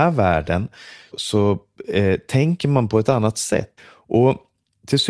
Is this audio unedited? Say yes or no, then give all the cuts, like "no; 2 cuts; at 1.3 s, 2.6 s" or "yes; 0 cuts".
no; 2 cuts; at 1.1 s, 3.8 s